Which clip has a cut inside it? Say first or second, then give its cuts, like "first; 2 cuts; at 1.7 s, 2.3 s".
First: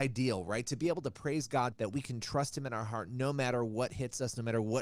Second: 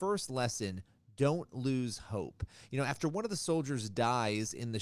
first; 1 cut; at 1.7 s